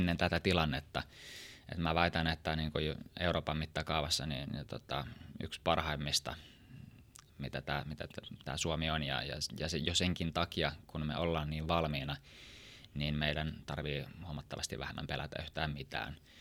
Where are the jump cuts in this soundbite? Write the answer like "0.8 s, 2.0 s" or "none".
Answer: 7.3 s